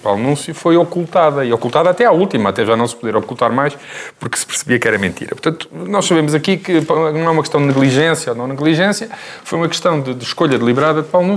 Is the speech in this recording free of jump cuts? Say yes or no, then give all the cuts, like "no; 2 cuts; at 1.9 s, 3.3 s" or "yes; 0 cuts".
yes; 0 cuts